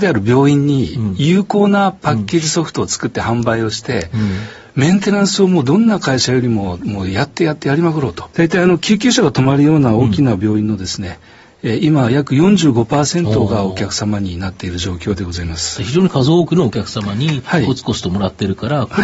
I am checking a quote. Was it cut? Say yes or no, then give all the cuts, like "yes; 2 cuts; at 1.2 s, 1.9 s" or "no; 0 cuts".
yes; 1 cut; at 8.3 s